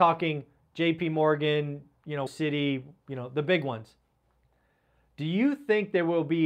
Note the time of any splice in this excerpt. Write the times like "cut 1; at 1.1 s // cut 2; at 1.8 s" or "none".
cut 1; at 2.3 s